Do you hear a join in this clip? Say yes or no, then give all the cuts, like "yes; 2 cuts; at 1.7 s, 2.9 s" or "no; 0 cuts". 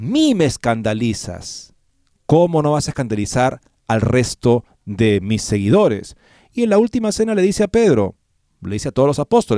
no; 0 cuts